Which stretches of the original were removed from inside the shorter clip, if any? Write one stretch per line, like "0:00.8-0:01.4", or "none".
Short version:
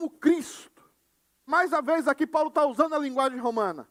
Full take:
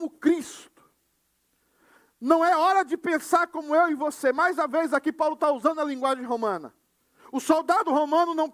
0:01.5-0:04.3